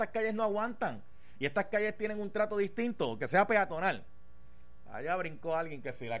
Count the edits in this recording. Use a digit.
0